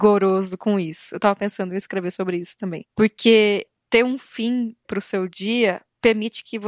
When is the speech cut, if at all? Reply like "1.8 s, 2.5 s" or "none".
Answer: none